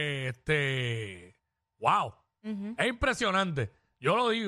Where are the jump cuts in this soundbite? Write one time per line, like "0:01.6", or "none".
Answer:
none